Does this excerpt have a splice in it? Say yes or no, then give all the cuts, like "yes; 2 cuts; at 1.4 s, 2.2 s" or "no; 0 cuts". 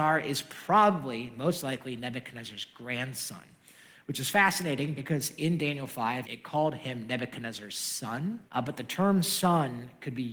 yes; 2 cuts; at 6.2 s, 8.5 s